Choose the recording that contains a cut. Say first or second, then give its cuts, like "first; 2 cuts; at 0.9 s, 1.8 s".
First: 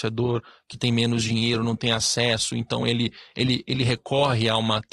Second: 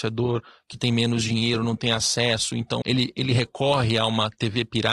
second; 1 cut; at 2.8 s